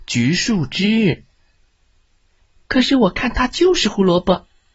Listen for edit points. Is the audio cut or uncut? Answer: uncut